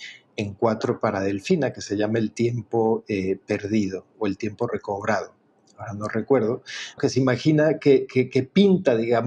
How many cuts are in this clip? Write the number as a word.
one